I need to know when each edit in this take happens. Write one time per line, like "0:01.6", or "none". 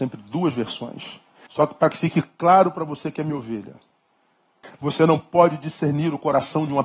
0:01.5
0:04.6